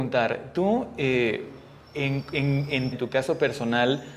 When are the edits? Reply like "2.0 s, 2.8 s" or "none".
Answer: 2.9 s

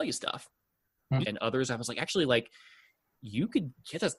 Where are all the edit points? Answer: 1.2 s

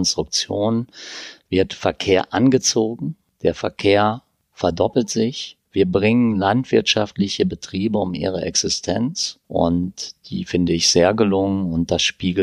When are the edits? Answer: 5.6 s, 9.4 s

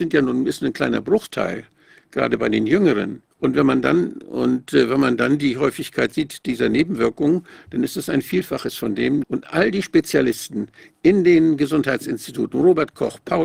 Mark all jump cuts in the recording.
3.3 s, 9.2 s

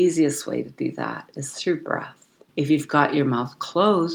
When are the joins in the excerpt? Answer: 2.5 s

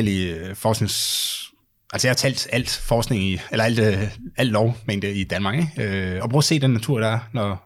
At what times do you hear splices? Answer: 6.2 s

